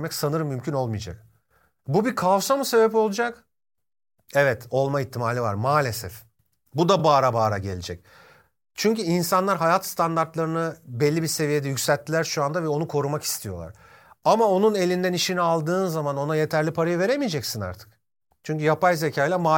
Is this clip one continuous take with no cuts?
yes; 0 cuts

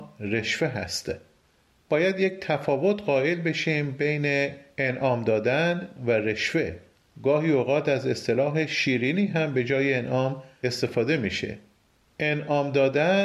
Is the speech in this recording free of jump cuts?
yes; 0 cuts

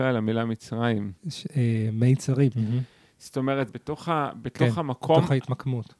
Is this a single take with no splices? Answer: no; 3 cuts; at 1.2 s, 2.5 s, 3.7 s

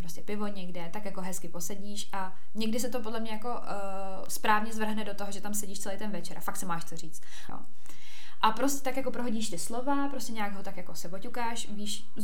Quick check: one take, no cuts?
no; 1 cut; at 7.5 s

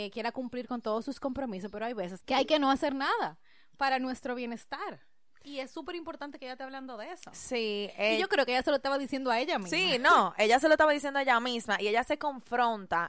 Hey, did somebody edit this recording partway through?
yes; 1 cut; at 2.2 s

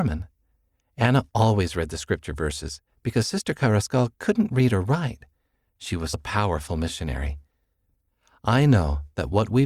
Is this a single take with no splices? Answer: no; 1 cut; at 6.1 s

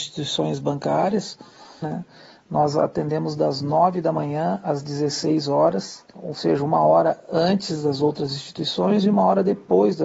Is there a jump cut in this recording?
yes; 1 cut; at 1.8 s

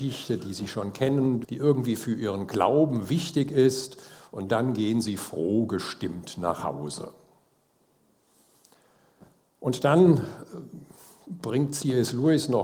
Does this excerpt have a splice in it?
yes; 1 cut; at 1.4 s

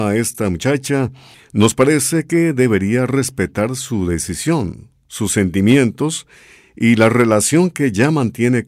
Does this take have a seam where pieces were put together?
no; 0 cuts

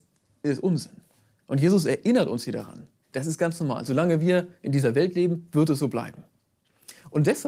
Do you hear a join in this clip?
yes; 1 cut; at 3.0 s

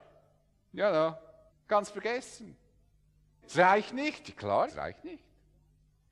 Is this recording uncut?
no; 3 cuts; at 1.5 s, 3.4 s, 4.7 s

